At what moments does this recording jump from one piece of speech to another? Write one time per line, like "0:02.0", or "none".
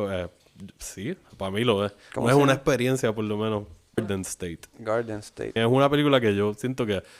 0:04.0
0:05.6

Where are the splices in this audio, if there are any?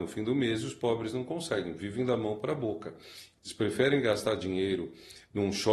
0:03.3

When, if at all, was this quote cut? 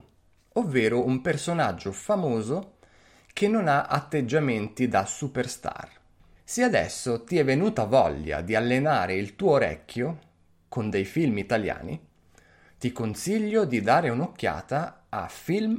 0:06.4

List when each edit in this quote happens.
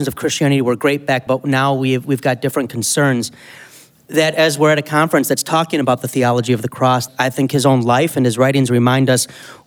0:01.3
0:07.1

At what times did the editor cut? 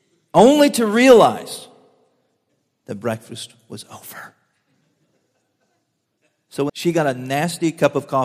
0:06.7

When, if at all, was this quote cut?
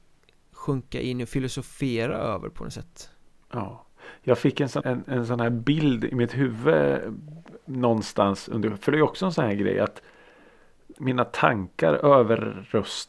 0:04.8
0:10.9

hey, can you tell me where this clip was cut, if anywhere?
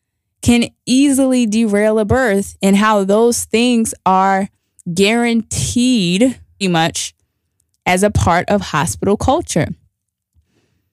0:06.6

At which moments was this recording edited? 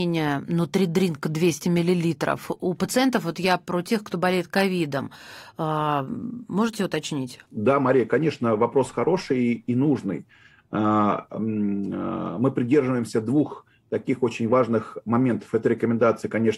0:07.4
0:11.4

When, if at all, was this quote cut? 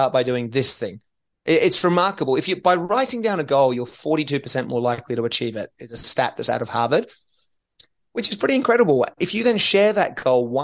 none

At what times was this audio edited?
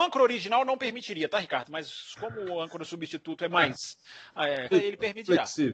0:03.5
0:04.7

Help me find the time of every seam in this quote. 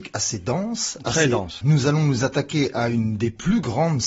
0:01.6

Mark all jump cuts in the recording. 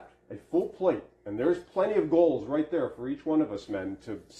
none

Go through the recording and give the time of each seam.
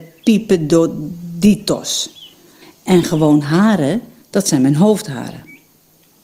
0:02.6

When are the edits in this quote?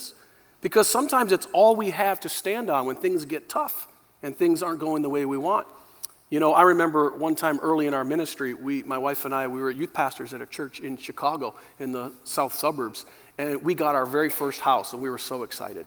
none

